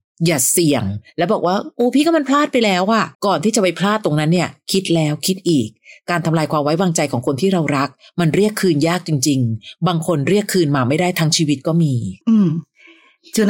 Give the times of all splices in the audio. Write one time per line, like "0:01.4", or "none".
0:03.1
0:12.2